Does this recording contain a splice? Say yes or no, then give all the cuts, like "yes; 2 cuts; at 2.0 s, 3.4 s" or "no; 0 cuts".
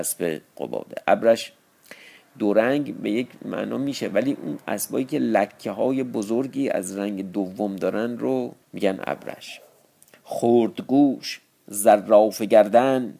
yes; 1 cut; at 8.6 s